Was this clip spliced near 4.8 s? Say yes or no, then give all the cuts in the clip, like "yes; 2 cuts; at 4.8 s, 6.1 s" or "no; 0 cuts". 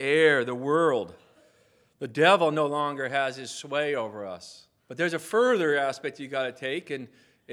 yes; 1 cut; at 4.8 s